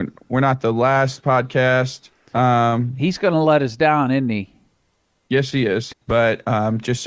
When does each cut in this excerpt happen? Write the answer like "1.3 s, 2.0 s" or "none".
2.3 s, 5.9 s